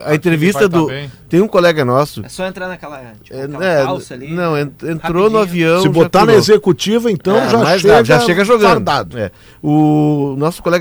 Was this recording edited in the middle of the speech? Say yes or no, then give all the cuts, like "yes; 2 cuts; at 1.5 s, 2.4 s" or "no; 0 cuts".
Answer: no; 0 cuts